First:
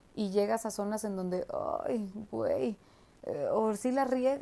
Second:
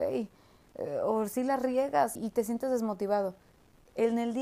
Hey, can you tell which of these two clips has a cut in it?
second; 1 cut; at 2.2 s

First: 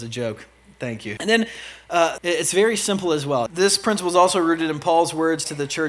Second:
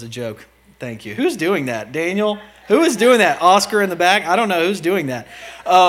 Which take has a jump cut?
first; 3 cuts; at 1.2 s, 2.2 s, 3.5 s

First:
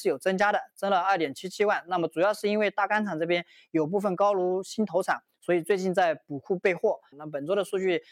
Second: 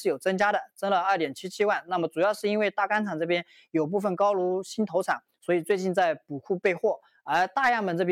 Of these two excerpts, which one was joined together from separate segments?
first; 1 cut; at 7.1 s

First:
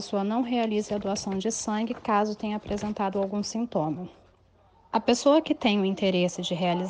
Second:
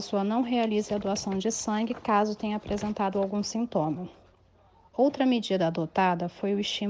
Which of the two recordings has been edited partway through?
second; 1 cut; at 4.9 s

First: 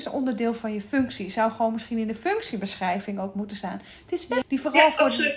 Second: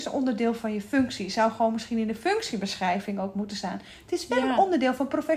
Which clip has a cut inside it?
first; 1 cut; at 4.4 s

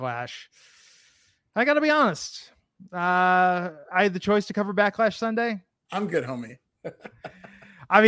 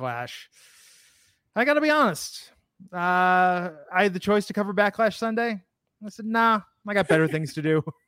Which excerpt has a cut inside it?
first; 1 cut; at 5.9 s

